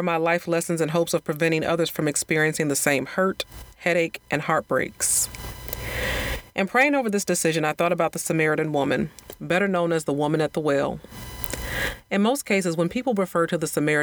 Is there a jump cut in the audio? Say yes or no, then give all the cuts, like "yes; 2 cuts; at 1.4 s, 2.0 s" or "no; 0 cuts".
no; 0 cuts